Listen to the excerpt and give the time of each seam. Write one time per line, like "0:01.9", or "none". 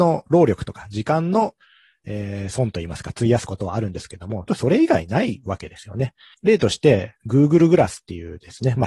0:04.5
0:06.3